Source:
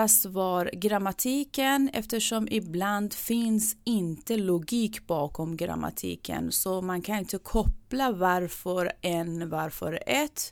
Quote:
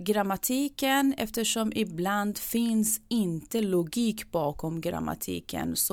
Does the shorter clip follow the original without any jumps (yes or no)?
yes